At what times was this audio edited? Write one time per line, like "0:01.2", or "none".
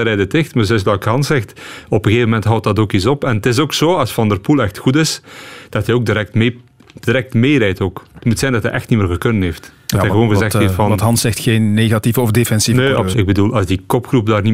0:13.1